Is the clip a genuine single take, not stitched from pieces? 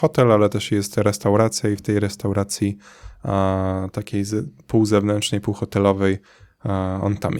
yes; 0 cuts

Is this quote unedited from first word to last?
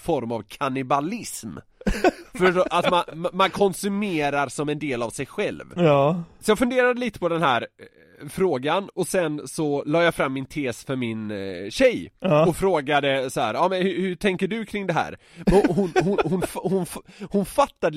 yes; 0 cuts

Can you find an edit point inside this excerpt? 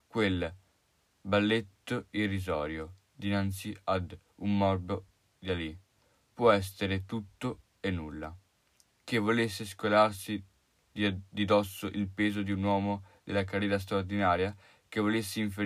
no; 0 cuts

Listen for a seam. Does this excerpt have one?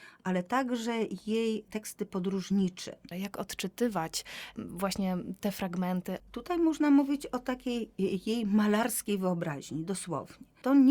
yes; 2 cuts; at 3.1 s, 6.2 s

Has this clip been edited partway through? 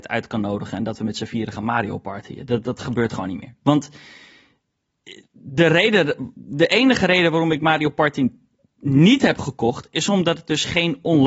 yes; 1 cut; at 3.6 s

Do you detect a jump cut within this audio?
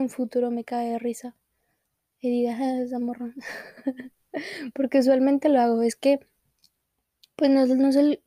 no; 0 cuts

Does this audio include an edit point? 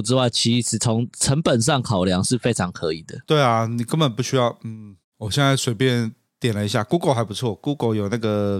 no; 0 cuts

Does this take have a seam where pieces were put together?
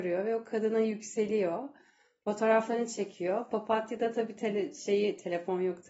no; 0 cuts

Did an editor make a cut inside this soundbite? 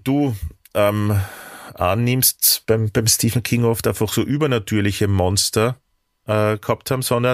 no; 0 cuts

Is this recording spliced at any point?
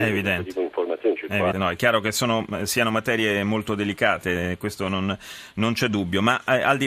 yes; 1 cut; at 1.5 s

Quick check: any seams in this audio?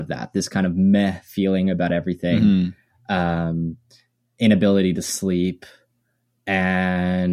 no; 0 cuts

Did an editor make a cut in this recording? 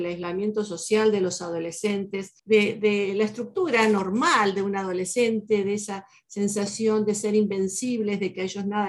yes; 1 cut; at 2.4 s

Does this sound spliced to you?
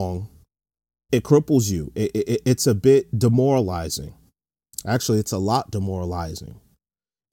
yes; 1 cut; at 1.1 s

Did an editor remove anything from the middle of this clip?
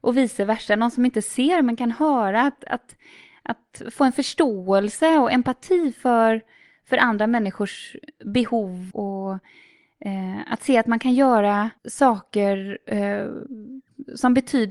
yes; 2 cuts; at 8.9 s, 11.8 s

